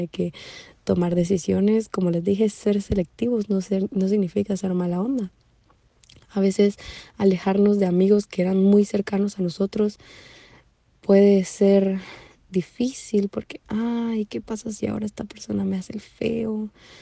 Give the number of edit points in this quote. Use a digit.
0